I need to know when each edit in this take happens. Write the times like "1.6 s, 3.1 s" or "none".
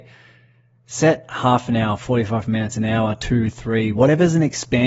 3.9 s